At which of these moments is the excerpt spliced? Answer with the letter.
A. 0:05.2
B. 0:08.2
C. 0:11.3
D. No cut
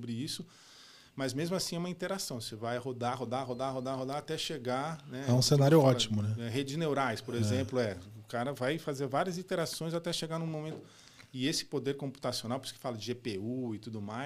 D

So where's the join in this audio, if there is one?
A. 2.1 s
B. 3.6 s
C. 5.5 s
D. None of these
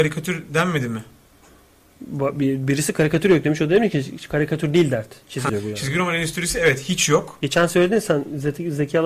C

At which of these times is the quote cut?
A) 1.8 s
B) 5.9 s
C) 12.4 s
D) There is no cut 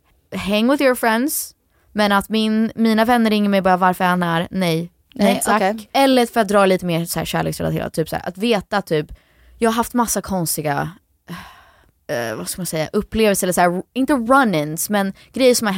B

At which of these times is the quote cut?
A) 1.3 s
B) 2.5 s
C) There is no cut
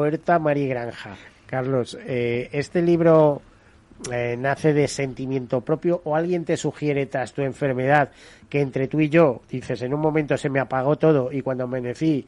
A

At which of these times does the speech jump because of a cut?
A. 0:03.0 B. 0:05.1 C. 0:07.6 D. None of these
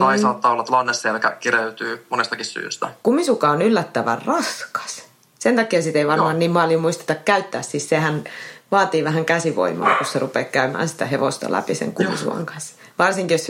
A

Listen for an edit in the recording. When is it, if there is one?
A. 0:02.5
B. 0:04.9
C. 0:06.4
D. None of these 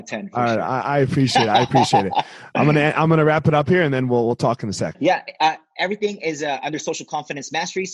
B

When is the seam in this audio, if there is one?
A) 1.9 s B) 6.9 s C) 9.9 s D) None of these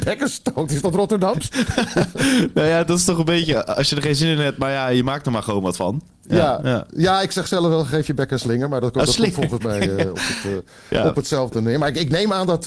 B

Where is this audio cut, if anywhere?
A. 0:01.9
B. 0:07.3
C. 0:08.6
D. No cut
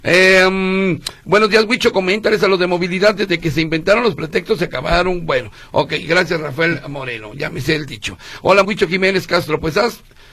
C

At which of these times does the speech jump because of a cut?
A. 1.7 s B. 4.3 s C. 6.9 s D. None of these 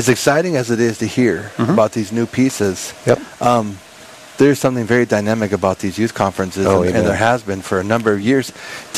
D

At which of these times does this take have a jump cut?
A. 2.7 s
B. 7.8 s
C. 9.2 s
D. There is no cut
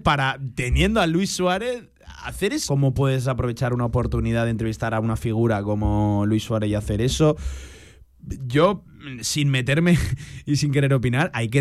A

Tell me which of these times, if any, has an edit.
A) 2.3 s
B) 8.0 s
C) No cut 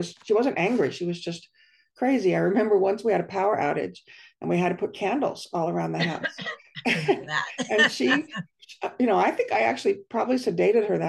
C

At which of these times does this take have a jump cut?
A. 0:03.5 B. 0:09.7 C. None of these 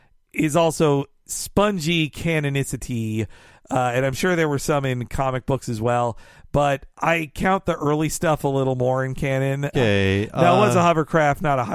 B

